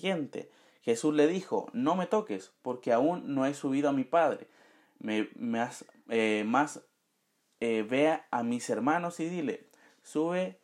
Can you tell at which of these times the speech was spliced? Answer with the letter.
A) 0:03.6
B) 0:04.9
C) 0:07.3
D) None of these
D